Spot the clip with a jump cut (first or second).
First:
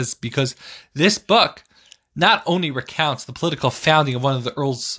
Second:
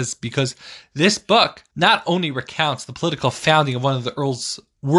second